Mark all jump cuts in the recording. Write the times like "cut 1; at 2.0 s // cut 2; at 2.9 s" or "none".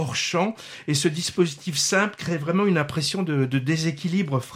none

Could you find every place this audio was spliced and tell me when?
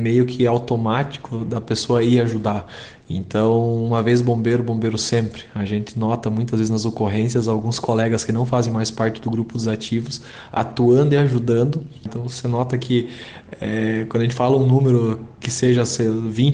cut 1; at 12.1 s

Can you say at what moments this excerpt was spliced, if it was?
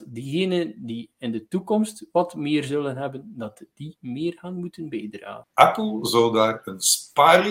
cut 1; at 5.4 s

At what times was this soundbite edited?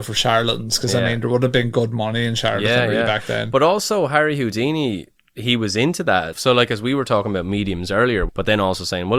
cut 1; at 6.3 s // cut 2; at 8.3 s

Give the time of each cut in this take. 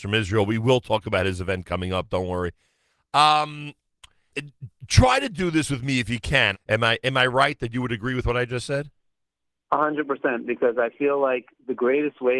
cut 1; at 4.3 s // cut 2; at 6.5 s

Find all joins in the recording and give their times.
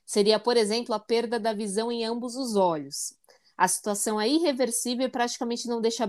none

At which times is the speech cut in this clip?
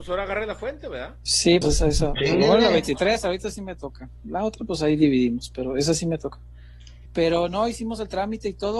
cut 1; at 1.6 s // cut 2; at 7.1 s

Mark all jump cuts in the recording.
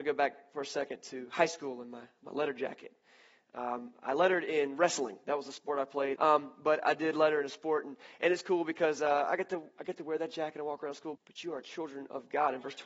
cut 1; at 6.2 s // cut 2; at 11.2 s

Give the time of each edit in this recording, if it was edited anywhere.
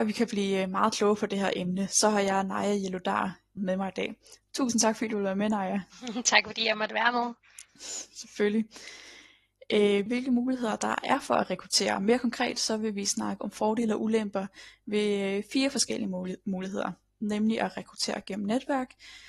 cut 1; at 3.6 s // cut 2; at 10.1 s

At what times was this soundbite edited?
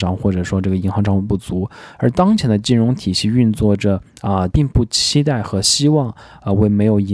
cut 1; at 4.5 s

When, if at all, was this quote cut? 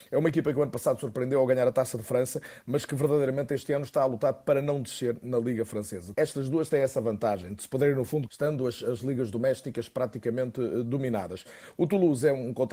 cut 1; at 6.1 s // cut 2; at 8.3 s

